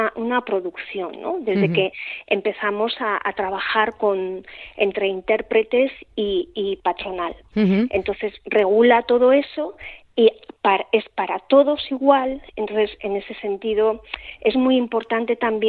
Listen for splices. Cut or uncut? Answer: uncut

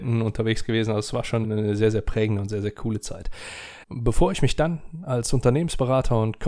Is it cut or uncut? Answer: cut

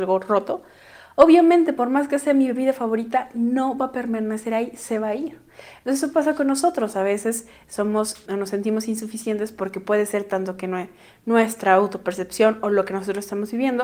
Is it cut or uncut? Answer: cut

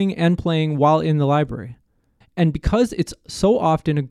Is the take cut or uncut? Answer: cut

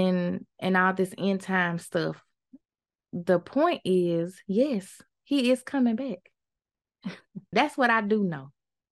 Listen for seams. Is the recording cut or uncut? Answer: cut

